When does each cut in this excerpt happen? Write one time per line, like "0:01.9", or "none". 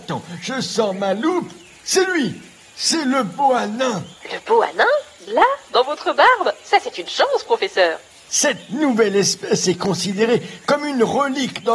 none